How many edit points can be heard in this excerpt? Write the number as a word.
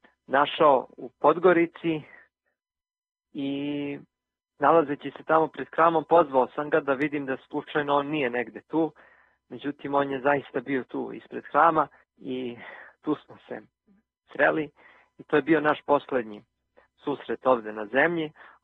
one